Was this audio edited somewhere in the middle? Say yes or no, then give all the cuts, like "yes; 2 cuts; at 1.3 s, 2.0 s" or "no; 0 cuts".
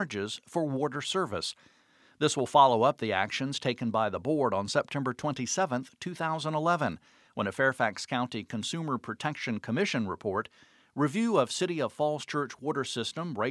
no; 0 cuts